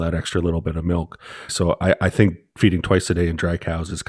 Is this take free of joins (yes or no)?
no